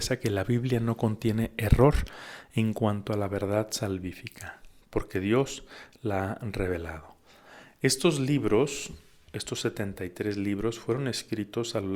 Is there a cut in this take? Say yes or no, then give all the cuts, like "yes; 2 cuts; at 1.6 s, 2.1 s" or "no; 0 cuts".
no; 0 cuts